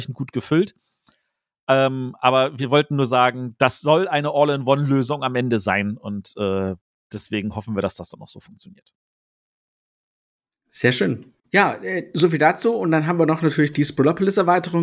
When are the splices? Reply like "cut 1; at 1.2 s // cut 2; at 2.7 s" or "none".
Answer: cut 1; at 11.4 s